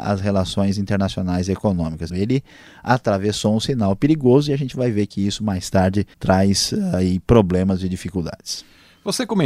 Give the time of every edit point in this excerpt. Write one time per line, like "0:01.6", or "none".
0:02.1
0:06.1